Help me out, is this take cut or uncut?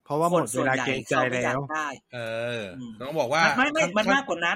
uncut